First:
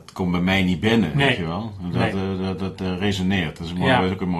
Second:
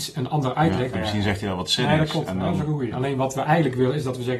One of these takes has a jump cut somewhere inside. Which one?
second; 2 cuts; at 0.9 s, 2.9 s

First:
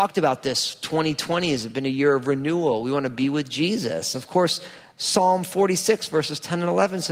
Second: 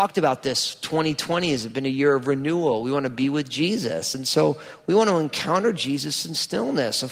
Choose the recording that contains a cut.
first; 1 cut; at 4.1 s

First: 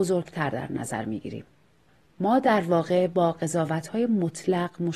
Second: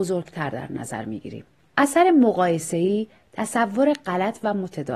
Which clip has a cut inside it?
second; 1 cut; at 1.6 s

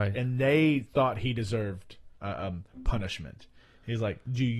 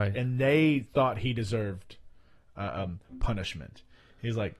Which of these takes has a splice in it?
first; 1 cut; at 2.2 s

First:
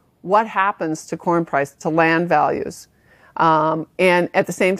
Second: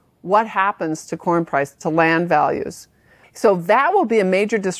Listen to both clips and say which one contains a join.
second; 1 cut; at 3.2 s

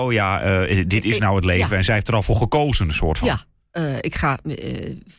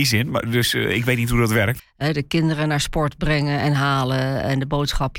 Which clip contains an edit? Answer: second; 1 cut; at 1.8 s

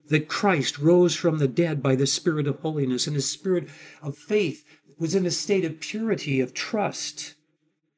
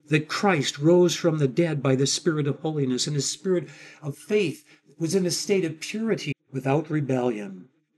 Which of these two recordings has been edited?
second; 1 cut; at 6.3 s

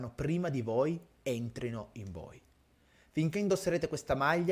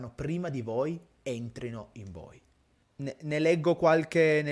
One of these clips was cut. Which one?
second; 1 cut; at 2.8 s

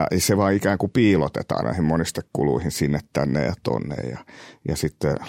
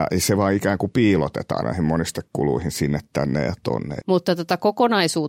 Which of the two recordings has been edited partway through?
second; 1 cut; at 4.0 s

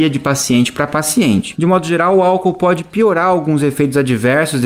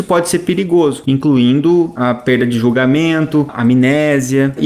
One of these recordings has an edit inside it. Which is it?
second; 1 cut; at 1.1 s

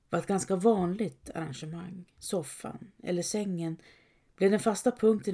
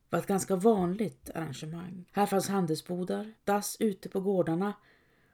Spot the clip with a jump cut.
second; 2 cuts; at 2.1 s, 3.4 s

